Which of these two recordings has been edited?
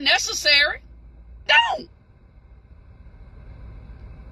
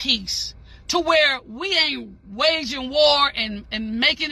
first; 1 cut; at 1.5 s

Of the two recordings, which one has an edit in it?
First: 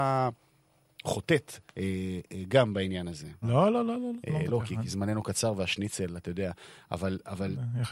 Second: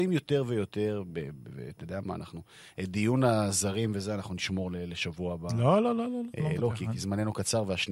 first; 1 cut; at 3.4 s

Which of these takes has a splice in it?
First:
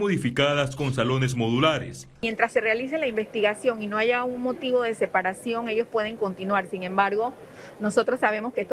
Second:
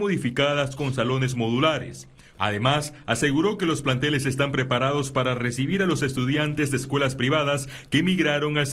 first; 1 cut; at 2.2 s

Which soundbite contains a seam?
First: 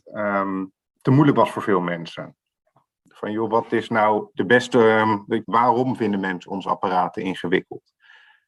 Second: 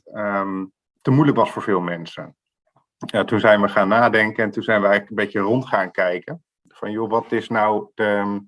first; 3 cuts; at 3.0 s, 4.3 s, 5.4 s

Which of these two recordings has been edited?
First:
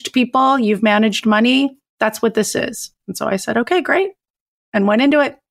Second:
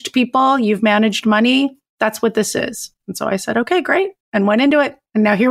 second; 1 cut; at 4.2 s

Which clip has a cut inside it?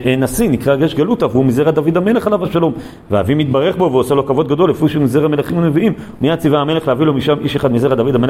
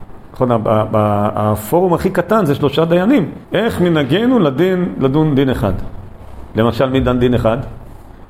second; 1 cut; at 3.4 s

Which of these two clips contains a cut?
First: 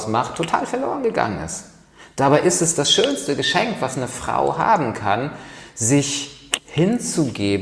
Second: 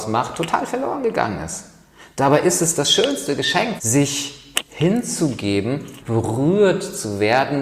second; 2 cuts; at 3.8 s, 6.0 s

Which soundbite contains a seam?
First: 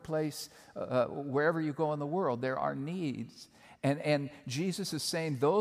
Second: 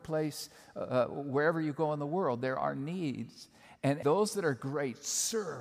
second; 1 cut; at 4.0 s

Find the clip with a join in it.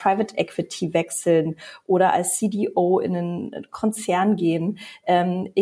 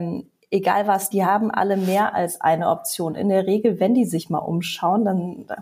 second; 1 cut; at 1.1 s

